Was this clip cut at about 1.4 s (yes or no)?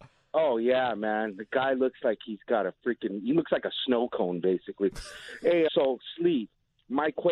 no